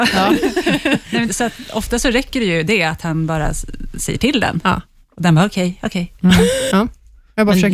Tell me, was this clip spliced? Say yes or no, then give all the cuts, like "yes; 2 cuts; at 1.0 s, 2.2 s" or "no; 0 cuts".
yes; 2 cuts; at 1.3 s, 6.7 s